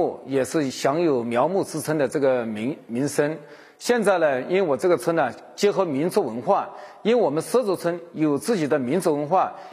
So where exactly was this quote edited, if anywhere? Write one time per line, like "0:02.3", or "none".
none

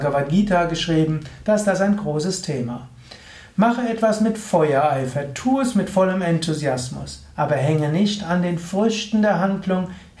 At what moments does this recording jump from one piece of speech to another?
none

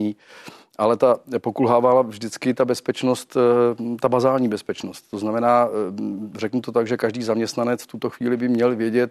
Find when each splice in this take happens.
none

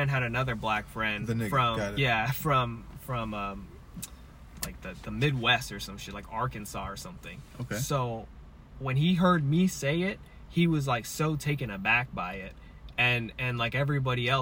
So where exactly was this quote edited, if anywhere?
none

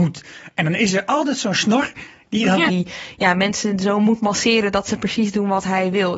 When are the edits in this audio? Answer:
0:02.7

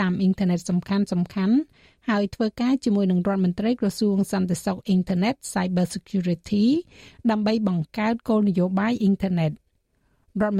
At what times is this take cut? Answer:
none

